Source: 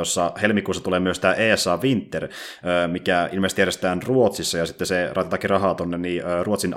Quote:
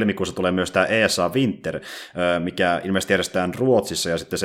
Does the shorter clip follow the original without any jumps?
yes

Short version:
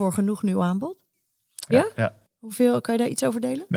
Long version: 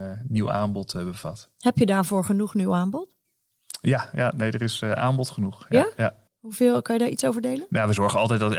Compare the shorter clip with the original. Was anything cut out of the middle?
yes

